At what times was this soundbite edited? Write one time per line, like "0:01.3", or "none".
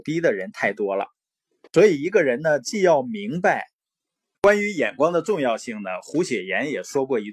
0:04.3

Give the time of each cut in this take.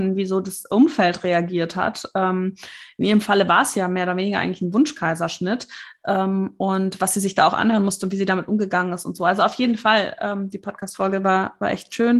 none

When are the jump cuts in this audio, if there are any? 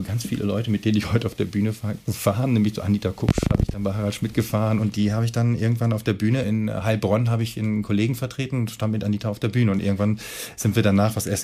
0:06.4

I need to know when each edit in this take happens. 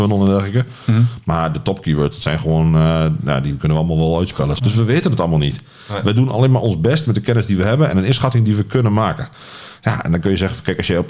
0:04.6

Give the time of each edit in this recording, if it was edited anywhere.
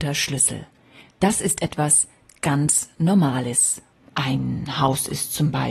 0:01.1
0:04.0

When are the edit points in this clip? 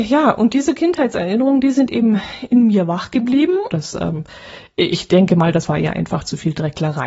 0:03.7

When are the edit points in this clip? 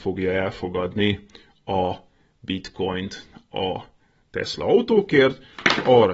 none

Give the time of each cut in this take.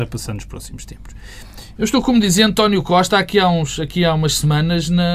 0:01.8

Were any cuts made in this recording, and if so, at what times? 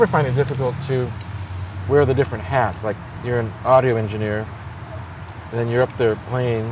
none

